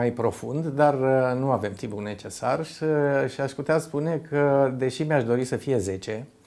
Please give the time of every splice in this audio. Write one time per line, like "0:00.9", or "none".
none